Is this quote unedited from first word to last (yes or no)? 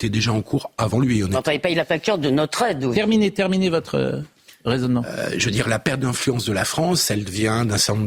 yes